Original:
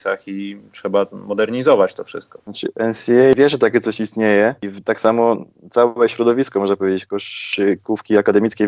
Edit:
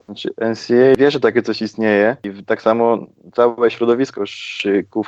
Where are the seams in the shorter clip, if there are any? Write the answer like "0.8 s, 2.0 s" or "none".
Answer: 4.1 s